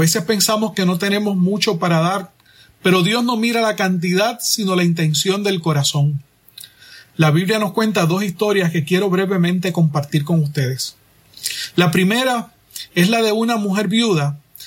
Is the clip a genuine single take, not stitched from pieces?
yes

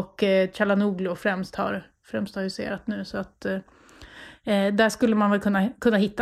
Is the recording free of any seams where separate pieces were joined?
yes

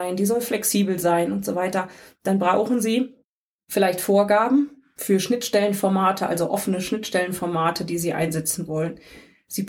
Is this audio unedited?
yes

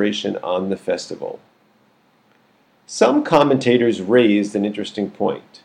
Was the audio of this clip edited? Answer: no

